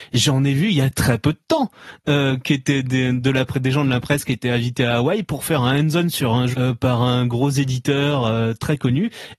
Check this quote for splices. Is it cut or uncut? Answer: cut